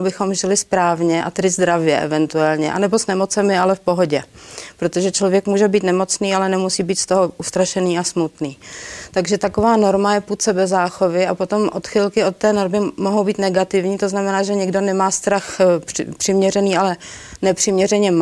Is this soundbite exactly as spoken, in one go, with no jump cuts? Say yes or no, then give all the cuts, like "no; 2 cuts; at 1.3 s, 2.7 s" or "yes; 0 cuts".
yes; 0 cuts